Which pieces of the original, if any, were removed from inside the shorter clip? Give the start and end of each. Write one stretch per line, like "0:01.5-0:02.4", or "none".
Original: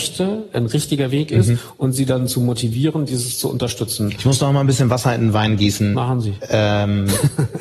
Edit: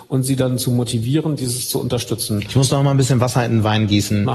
none